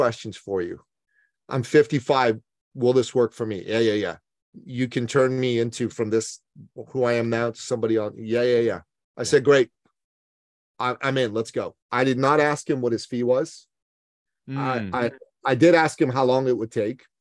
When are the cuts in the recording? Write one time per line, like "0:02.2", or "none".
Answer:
0:11.8